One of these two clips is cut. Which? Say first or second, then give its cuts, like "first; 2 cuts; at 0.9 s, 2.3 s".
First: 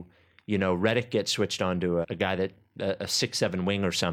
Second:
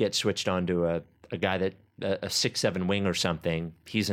first; 1 cut; at 2.0 s